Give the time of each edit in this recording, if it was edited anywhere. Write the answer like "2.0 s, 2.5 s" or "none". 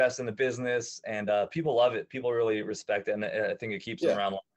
none